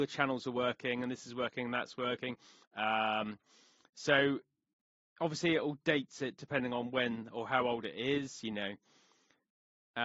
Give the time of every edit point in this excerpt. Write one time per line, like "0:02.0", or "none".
0:02.6